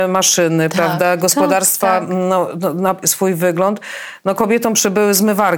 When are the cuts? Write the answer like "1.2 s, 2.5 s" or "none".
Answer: 3.0 s